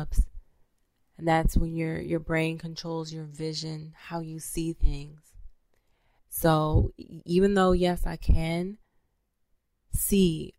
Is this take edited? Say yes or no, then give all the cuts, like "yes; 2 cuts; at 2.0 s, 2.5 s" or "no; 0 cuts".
yes; 2 cuts; at 2.0 s, 6.2 s